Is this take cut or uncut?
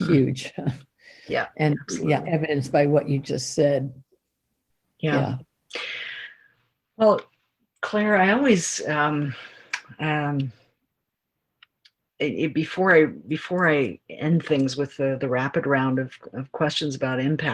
uncut